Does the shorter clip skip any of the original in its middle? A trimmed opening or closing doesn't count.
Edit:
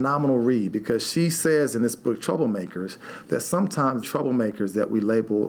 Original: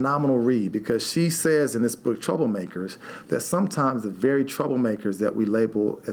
yes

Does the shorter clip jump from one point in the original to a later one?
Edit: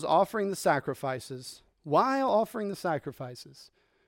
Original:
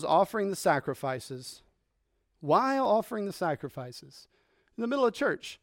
yes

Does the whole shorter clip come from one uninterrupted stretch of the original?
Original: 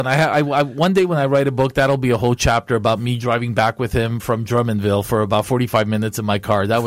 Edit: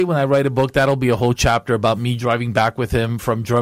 yes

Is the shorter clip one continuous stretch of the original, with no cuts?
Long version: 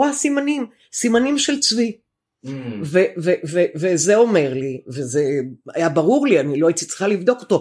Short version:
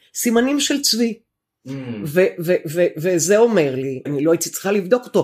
no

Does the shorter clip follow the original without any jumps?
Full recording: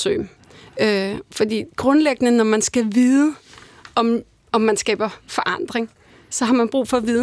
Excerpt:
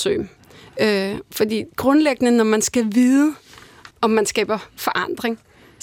no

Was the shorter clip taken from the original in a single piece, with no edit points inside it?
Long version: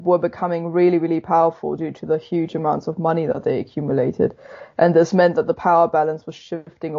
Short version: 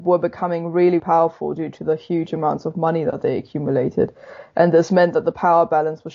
no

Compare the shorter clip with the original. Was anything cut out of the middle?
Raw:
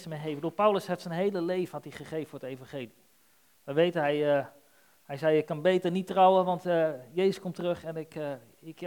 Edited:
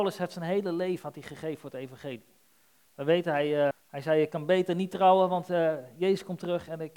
yes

